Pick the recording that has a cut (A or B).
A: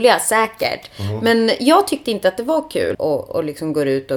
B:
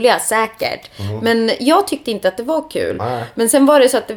A